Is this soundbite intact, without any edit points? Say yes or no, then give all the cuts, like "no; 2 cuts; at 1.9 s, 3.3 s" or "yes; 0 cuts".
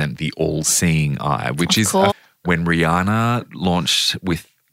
no; 1 cut; at 2.1 s